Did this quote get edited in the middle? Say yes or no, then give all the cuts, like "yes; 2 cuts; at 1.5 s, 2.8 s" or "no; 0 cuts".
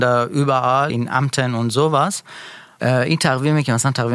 yes; 2 cuts; at 0.9 s, 2.8 s